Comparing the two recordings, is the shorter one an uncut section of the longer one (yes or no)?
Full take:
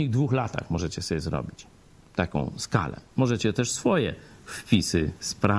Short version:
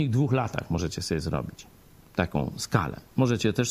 yes